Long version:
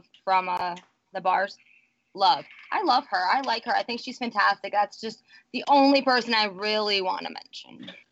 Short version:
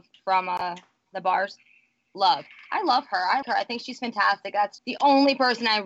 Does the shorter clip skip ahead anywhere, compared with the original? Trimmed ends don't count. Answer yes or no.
yes